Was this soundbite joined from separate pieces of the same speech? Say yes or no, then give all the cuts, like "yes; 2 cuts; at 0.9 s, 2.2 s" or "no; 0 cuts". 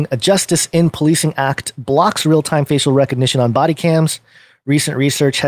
no; 0 cuts